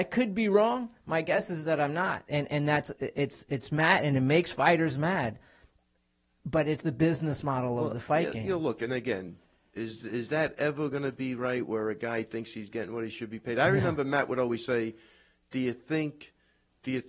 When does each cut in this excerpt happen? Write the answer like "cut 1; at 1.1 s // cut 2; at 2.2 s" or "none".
cut 1; at 6.8 s